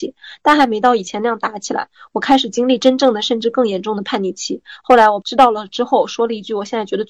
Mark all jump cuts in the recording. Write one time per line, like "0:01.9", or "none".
0:04.8